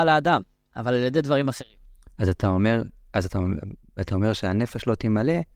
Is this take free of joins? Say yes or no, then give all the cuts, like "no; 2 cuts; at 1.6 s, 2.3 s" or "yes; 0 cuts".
yes; 0 cuts